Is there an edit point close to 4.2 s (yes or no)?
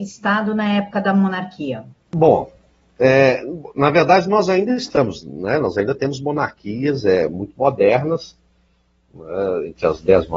no